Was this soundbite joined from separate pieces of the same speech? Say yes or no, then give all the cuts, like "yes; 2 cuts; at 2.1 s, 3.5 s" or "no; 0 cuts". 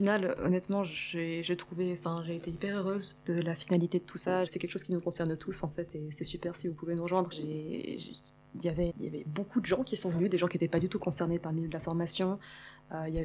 yes; 3 cuts; at 4.5 s, 7.3 s, 8.9 s